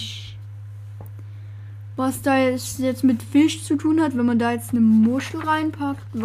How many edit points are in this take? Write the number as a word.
one